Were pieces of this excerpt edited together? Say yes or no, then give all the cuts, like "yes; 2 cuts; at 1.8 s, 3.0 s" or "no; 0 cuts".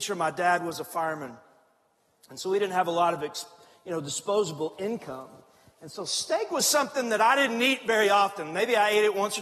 no; 0 cuts